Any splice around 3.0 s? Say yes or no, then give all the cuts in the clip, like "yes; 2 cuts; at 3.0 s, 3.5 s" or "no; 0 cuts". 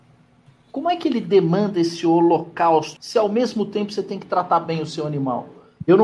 yes; 1 cut; at 3.0 s